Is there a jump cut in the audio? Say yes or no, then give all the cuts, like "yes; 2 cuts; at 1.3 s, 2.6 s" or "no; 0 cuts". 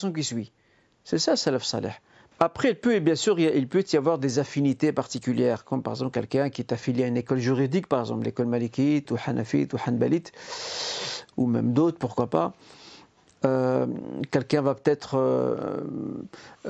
yes; 2 cuts; at 2.3 s, 9.1 s